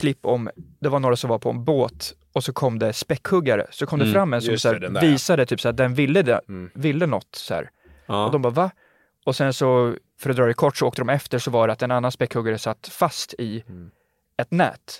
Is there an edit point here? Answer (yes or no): no